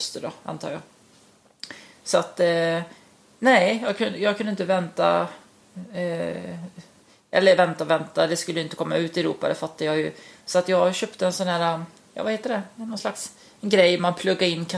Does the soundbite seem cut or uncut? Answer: uncut